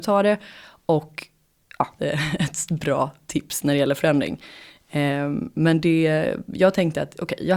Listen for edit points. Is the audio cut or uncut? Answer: cut